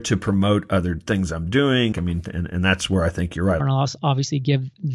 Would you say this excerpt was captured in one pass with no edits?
no; 2 cuts; at 1.9 s, 3.6 s

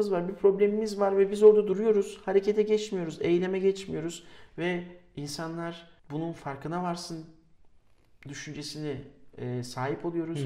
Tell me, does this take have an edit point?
yes; 1 cut; at 6.0 s

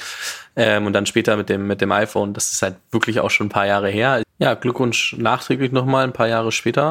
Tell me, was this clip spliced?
yes; 1 cut; at 4.2 s

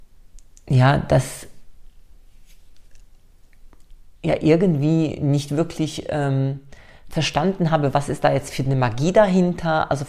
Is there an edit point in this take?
yes; 1 cut; at 4.2 s

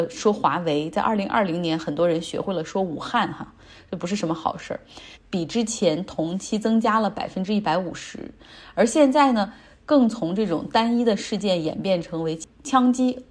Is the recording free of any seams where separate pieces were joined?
no; 1 cut; at 5.1 s

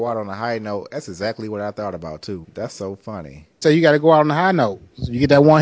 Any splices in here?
yes; 2 cuts; at 2.4 s, 3.6 s

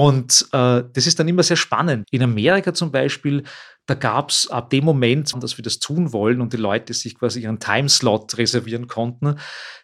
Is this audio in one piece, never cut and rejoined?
no; 2 cuts; at 2.0 s, 5.3 s

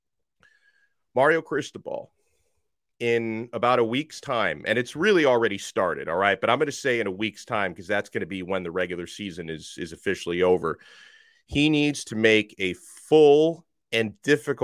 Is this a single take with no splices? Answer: yes; 0 cuts

